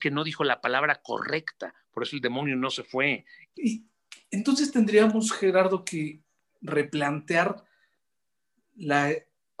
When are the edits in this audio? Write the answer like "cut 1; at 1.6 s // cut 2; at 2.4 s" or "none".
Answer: cut 1; at 3.5 s